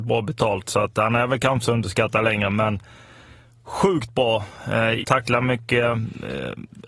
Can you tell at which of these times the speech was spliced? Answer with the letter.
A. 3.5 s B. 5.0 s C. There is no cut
B